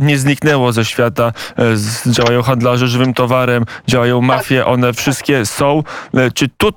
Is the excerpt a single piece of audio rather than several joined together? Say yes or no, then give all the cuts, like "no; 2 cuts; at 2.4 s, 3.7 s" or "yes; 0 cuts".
yes; 0 cuts